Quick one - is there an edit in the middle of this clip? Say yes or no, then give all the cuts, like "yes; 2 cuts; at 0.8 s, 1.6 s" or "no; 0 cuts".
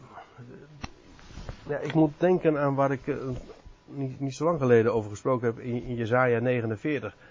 no; 0 cuts